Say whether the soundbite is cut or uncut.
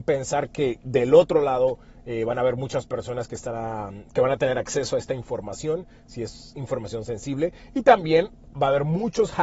uncut